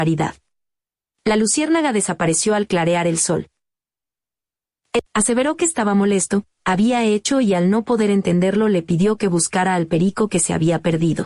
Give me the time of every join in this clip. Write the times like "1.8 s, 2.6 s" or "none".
5.0 s, 6.6 s